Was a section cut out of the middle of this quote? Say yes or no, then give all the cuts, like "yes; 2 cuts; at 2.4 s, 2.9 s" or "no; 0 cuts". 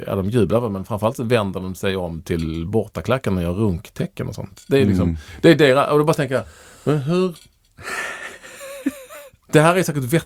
no; 0 cuts